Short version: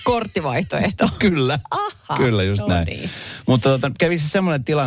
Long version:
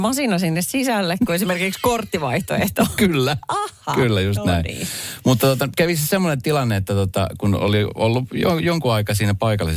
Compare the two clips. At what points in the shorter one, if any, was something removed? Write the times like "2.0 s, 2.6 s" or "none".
none